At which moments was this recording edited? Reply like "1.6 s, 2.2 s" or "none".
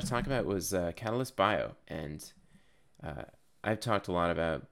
1.8 s